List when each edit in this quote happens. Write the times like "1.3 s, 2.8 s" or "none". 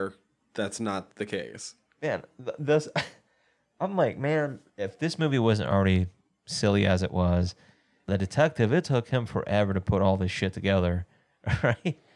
none